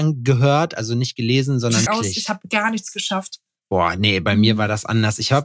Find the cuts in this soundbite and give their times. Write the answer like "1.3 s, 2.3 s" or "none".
1.9 s